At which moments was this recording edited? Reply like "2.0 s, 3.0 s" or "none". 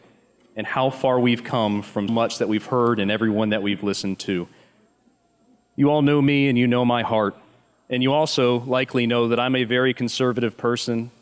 2.1 s